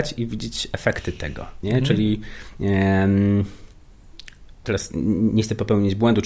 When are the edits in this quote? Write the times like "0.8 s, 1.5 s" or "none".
1.6 s